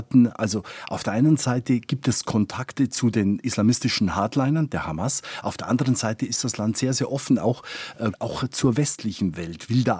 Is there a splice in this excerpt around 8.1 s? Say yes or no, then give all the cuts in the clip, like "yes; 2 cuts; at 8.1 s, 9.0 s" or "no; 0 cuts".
yes; 1 cut; at 8.1 s